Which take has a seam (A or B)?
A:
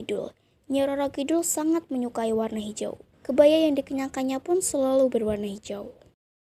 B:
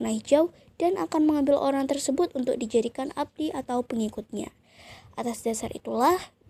A